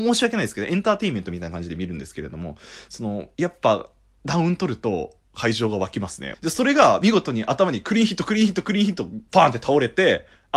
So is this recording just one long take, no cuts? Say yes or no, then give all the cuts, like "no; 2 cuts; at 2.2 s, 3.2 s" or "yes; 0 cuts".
no; 2 cuts; at 6.3 s, 9.3 s